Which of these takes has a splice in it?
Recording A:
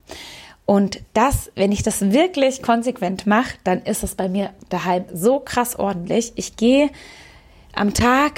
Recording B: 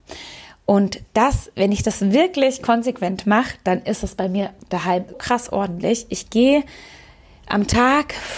B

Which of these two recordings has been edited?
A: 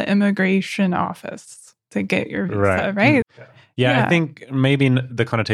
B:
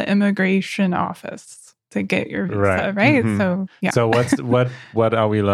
A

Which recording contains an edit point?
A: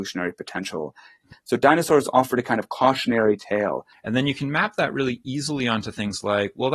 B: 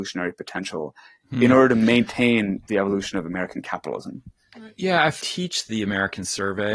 A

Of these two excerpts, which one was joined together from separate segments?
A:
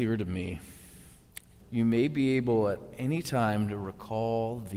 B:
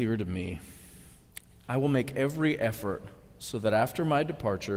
A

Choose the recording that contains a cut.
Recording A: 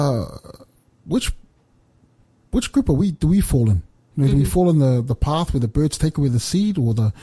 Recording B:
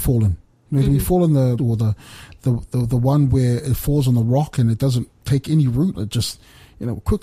B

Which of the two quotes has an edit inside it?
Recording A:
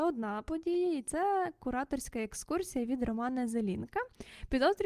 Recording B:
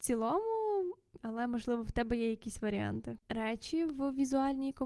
B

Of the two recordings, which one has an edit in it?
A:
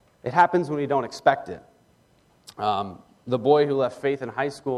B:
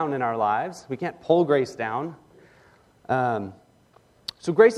B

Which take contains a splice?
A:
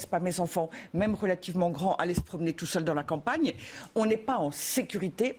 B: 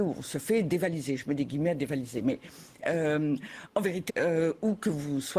B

